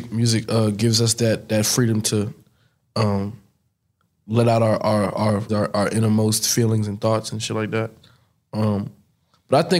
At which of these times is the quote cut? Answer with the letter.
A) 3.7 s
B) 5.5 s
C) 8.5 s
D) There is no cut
B